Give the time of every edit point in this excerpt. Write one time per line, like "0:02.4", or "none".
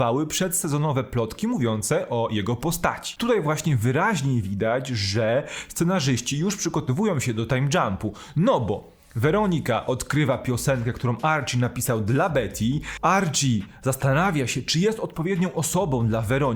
0:03.2